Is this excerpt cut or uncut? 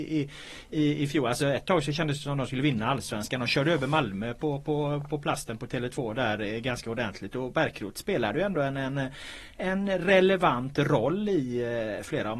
uncut